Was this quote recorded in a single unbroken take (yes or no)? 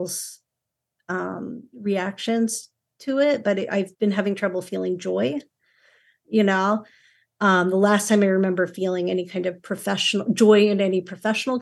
no